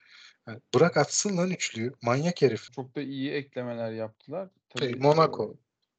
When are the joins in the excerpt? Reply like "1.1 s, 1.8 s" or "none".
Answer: 2.7 s